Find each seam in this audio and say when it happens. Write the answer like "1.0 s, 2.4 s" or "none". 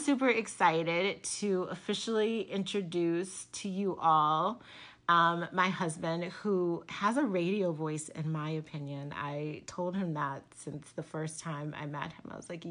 none